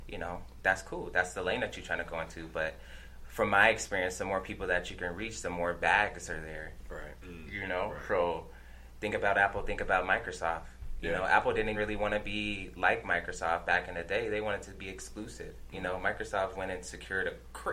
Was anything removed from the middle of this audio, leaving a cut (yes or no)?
yes